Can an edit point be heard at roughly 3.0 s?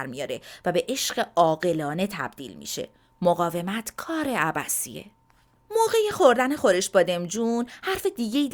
no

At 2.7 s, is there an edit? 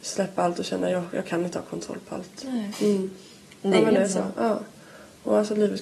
yes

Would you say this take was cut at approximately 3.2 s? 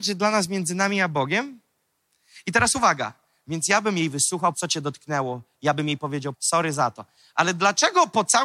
no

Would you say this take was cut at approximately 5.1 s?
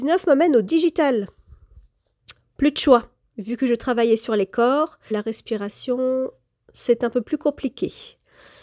yes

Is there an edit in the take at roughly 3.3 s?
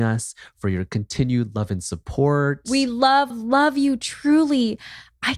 yes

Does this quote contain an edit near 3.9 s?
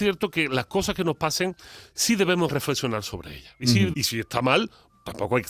yes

